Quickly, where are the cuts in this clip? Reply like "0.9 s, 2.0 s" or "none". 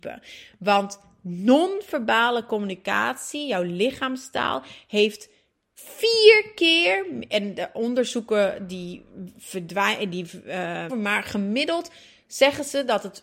10.9 s